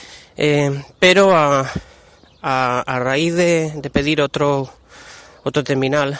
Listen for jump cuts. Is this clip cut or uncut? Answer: uncut